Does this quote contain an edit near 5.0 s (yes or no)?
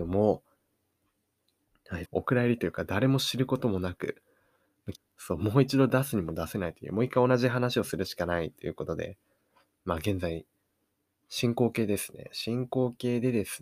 yes